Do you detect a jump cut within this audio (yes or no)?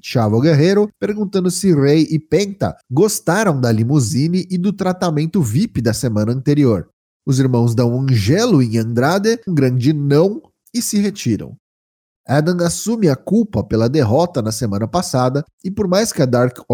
yes